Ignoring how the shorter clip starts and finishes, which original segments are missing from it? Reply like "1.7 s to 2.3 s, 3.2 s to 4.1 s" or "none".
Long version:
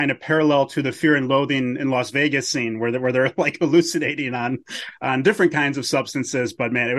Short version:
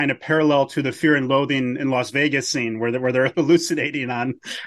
3.3 s to 3.6 s